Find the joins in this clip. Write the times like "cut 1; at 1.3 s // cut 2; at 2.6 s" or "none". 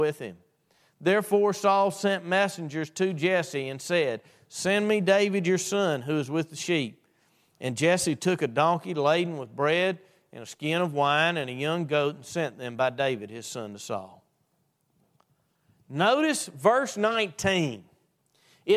none